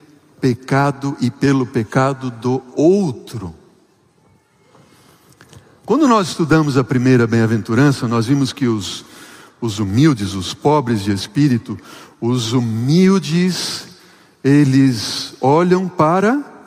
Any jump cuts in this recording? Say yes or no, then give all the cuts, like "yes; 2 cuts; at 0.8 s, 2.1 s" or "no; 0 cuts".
no; 0 cuts